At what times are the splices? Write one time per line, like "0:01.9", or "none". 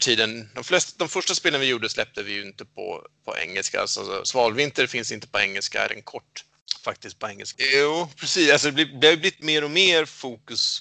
0:05.9
0:07.5